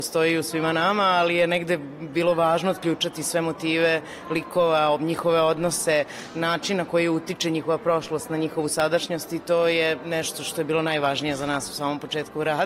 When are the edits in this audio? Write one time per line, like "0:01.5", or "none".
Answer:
none